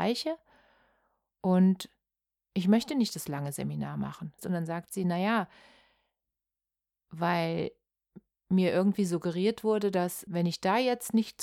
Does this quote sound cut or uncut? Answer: cut